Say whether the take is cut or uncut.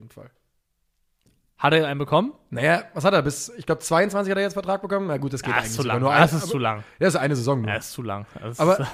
uncut